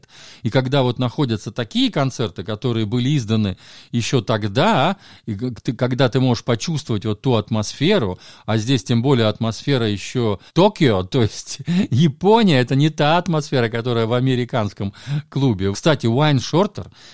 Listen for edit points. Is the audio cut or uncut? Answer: cut